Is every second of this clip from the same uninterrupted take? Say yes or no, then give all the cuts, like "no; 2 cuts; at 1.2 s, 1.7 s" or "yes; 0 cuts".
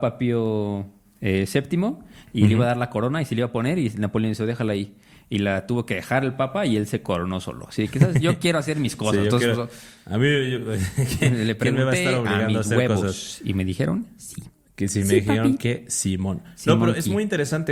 yes; 0 cuts